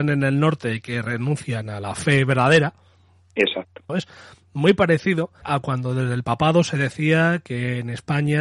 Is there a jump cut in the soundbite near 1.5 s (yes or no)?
no